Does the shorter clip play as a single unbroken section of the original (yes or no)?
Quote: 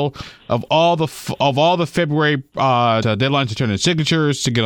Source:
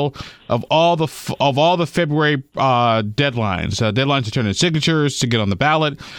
no